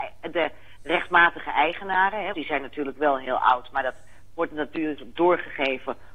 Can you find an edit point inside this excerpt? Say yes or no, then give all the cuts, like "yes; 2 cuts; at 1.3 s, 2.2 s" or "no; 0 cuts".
yes; 1 cut; at 2.3 s